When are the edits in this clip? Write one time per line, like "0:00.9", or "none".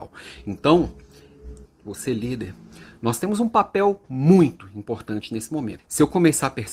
0:01.6
0:05.8